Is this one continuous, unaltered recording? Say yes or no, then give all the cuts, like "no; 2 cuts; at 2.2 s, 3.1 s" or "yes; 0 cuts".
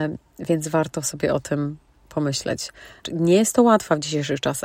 no; 1 cut; at 3.0 s